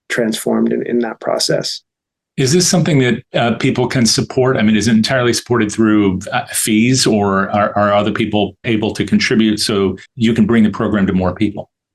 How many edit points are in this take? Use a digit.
2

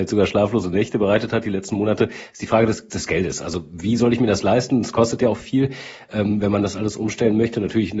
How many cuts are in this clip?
1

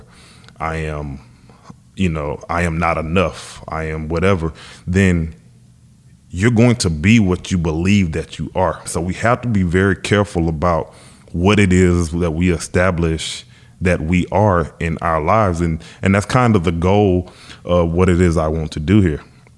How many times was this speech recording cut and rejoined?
1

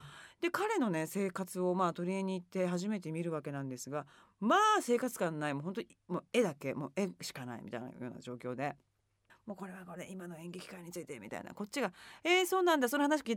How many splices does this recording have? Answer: 1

